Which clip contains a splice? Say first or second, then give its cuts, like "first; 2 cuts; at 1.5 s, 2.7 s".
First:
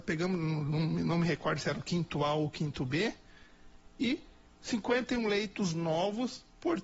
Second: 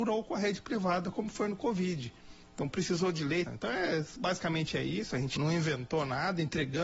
second; 2 cuts; at 3.5 s, 5.4 s